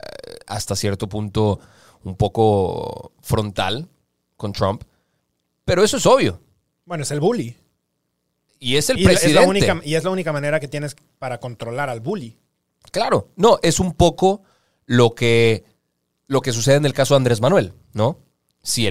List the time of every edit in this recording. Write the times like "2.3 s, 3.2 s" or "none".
13.6 s